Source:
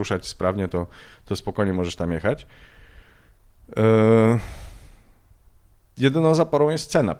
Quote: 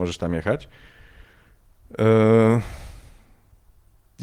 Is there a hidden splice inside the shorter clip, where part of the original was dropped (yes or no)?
no